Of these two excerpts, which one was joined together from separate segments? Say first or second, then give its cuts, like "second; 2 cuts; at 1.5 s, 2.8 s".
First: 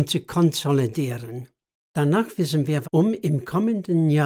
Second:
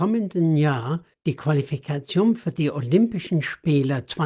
first; 2 cuts; at 1.7 s, 2.8 s